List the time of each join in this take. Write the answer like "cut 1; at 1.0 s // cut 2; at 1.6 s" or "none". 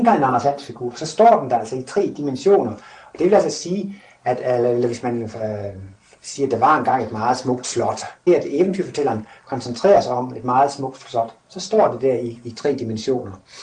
cut 1; at 8.3 s